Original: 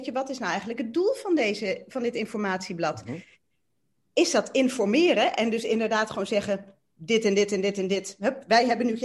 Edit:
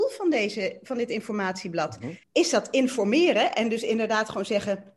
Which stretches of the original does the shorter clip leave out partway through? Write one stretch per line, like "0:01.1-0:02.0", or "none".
0:03.3-0:04.0